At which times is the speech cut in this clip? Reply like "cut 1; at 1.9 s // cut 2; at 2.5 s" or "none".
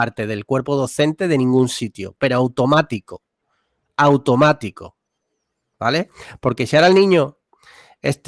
none